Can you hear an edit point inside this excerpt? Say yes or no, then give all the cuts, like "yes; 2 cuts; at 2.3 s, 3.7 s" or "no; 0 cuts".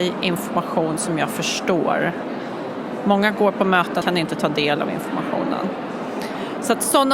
yes; 1 cut; at 4.0 s